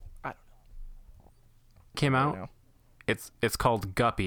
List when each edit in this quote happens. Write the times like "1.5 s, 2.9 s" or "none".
1.9 s